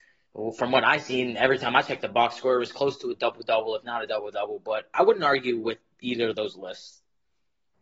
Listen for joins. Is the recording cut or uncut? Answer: uncut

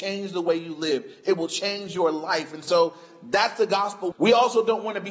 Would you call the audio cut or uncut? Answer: cut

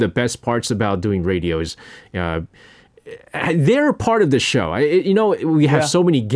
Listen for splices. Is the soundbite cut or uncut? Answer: uncut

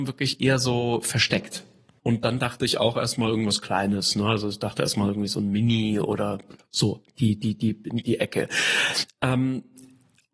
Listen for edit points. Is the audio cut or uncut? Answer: cut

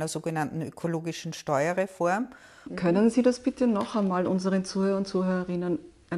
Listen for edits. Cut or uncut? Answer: cut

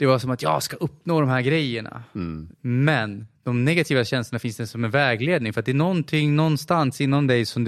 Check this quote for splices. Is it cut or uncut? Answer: cut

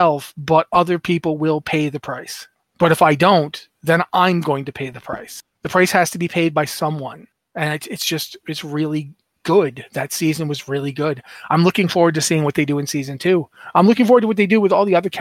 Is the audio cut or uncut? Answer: uncut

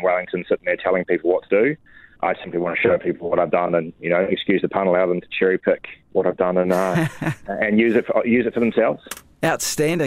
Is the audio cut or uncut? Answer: uncut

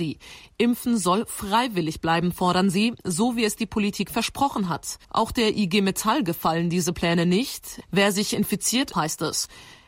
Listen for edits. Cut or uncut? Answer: cut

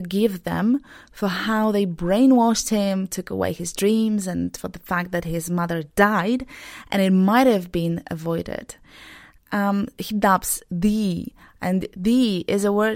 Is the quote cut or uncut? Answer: uncut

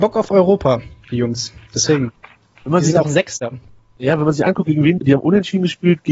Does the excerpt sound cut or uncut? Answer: cut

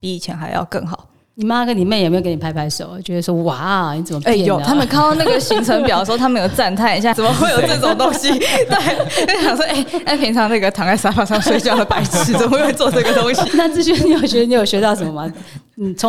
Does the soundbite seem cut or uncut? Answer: cut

